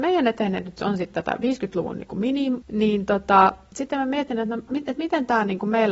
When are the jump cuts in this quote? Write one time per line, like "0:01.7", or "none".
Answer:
0:02.6
0:04.7